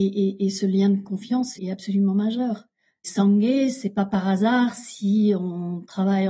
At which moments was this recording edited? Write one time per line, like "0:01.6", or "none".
0:01.6